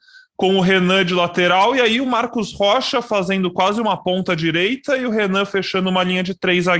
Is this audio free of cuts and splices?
yes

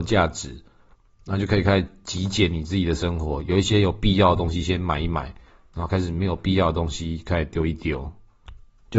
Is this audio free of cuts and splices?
yes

